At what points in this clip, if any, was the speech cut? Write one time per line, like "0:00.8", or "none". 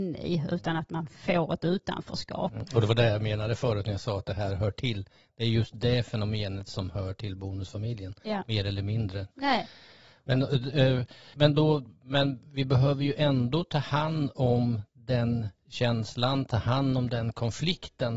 0:09.3
0:11.3